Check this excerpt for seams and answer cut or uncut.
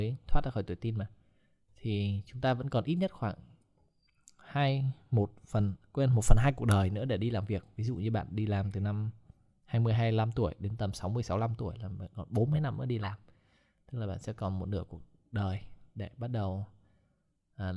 uncut